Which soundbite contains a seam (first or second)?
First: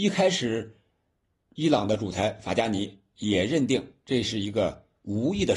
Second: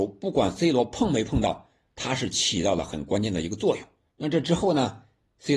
second